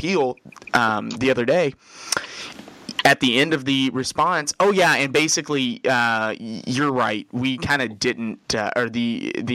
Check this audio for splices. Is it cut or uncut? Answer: uncut